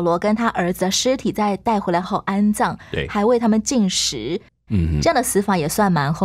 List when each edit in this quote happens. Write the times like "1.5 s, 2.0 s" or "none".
2.0 s, 4.7 s